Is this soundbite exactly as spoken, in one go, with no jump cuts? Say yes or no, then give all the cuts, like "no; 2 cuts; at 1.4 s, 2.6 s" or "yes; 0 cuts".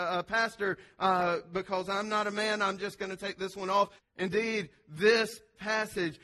no; 1 cut; at 4.0 s